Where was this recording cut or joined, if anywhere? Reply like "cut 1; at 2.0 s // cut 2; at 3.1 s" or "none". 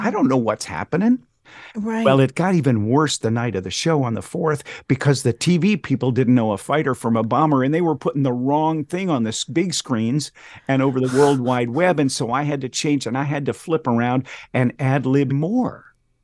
cut 1; at 15.3 s